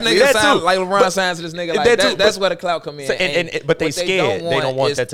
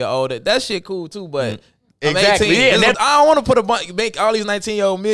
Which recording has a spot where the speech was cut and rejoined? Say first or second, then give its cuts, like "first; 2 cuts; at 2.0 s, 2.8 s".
second; 2 cuts; at 1.9 s, 2.9 s